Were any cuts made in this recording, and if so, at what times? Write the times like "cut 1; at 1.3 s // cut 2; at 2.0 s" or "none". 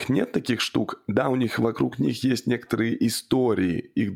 none